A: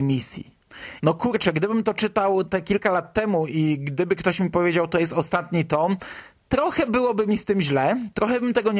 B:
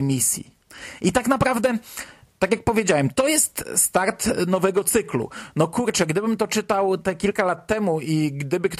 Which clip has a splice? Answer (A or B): A